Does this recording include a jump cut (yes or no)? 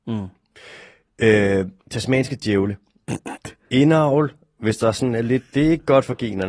yes